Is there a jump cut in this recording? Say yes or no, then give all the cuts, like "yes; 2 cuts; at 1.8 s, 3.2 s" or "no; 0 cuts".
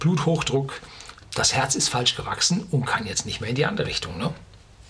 no; 0 cuts